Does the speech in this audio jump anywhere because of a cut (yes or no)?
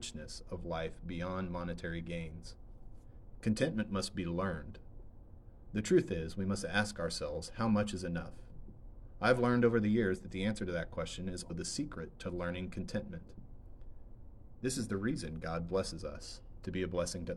yes